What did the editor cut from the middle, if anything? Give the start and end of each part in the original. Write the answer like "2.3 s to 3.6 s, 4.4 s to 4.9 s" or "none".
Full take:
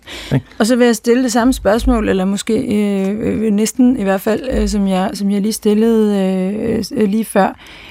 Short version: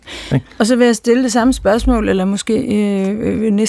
none